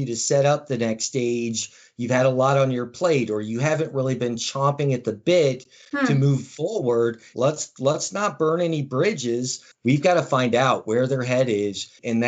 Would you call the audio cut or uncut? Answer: cut